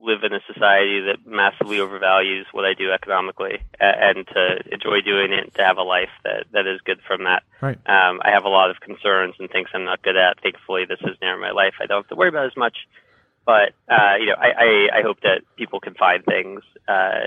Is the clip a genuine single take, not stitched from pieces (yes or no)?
yes